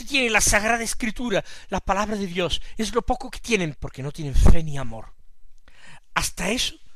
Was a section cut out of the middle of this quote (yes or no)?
yes